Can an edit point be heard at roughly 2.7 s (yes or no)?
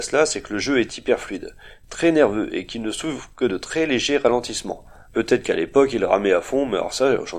no